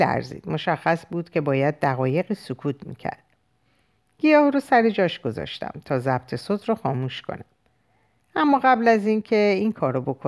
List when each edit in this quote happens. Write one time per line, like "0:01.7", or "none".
none